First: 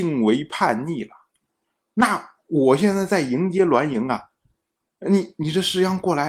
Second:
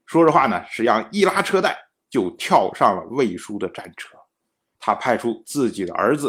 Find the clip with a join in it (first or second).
second